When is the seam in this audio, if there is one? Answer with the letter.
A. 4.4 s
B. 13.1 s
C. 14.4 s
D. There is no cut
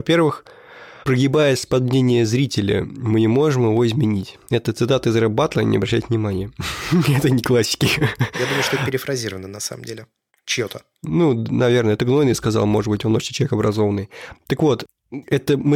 D